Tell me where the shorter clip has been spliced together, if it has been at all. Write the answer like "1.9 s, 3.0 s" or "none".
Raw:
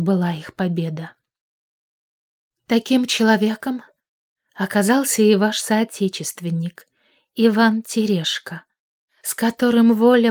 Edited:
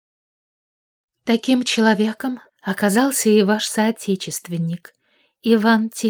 2.5 s